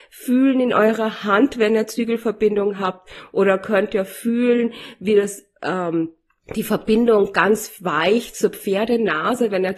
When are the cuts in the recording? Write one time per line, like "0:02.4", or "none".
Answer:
none